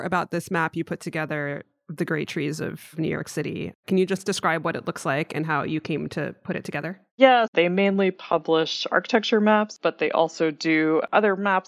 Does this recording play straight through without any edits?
no; 1 cut; at 7.5 s

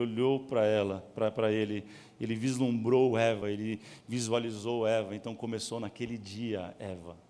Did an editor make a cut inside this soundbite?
yes; 1 cut; at 3.4 s

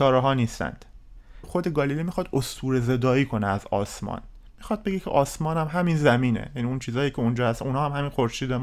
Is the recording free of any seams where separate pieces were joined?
no; 1 cut; at 1.4 s

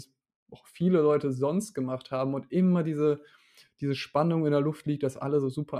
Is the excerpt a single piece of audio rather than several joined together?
yes; 0 cuts

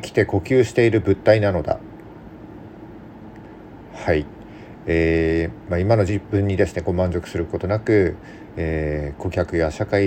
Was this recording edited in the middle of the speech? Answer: no; 0 cuts

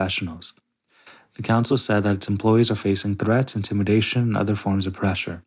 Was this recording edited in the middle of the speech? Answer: yes; 1 cut; at 1.7 s

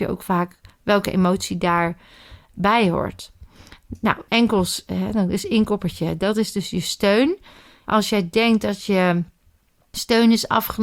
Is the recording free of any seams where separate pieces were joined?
yes; 0 cuts

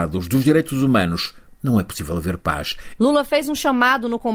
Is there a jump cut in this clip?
yes; 1 cut; at 3.0 s

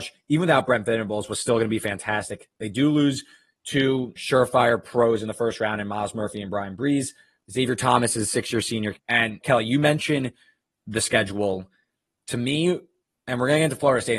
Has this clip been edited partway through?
yes; 1 cut; at 8.9 s

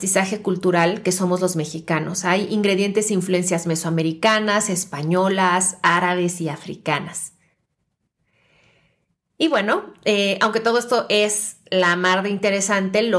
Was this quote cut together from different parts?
no; 0 cuts

